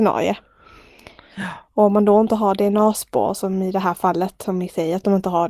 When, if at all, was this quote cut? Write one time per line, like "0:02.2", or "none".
none